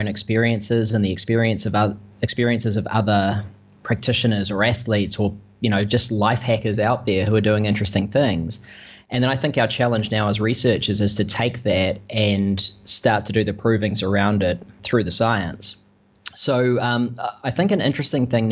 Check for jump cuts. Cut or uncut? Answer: cut